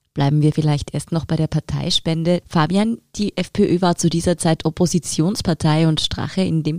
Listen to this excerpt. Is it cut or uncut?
cut